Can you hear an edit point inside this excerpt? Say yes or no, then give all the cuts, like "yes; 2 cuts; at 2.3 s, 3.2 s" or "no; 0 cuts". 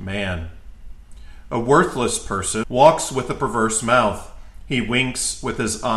yes; 1 cut; at 2.6 s